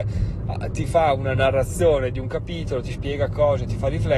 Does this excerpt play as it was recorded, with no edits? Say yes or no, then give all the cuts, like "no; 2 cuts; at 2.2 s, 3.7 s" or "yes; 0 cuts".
yes; 0 cuts